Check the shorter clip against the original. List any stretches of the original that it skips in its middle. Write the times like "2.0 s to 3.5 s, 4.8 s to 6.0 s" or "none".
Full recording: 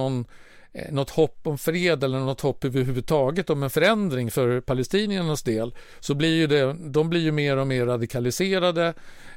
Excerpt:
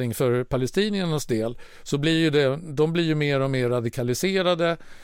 none